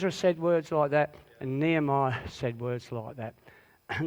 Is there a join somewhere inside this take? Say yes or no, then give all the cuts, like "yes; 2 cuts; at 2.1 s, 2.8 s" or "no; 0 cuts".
no; 0 cuts